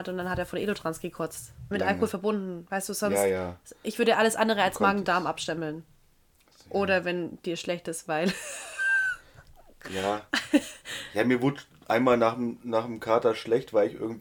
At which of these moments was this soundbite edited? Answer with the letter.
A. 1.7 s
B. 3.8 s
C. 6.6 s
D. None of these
A